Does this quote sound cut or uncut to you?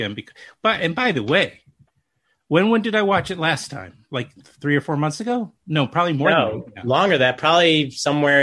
uncut